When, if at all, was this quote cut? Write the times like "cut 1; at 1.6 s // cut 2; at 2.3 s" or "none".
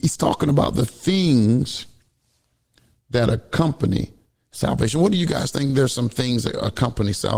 none